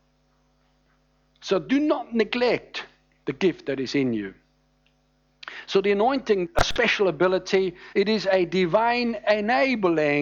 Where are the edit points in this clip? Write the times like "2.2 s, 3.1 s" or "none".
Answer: 6.4 s, 7.9 s